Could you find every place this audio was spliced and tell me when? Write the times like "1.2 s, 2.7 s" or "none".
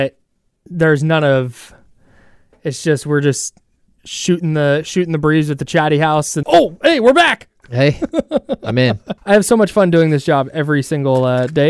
6.4 s, 9.2 s

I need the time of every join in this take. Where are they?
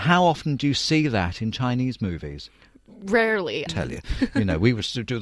3.7 s

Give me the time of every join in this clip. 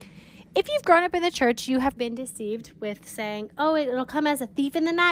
2.0 s

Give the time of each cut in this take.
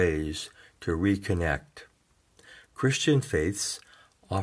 none

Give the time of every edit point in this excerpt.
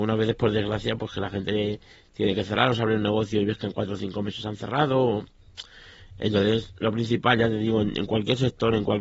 none

